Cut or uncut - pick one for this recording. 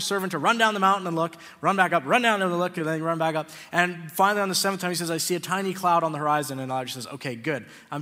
uncut